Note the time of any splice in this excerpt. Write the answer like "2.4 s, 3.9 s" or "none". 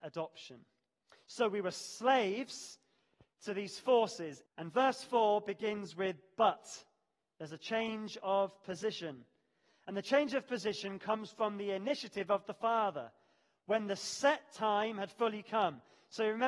4.5 s